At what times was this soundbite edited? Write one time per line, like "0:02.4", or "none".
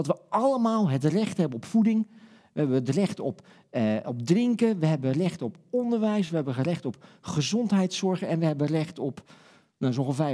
none